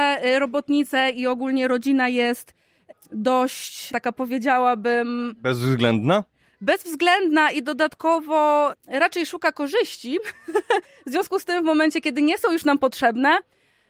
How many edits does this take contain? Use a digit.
0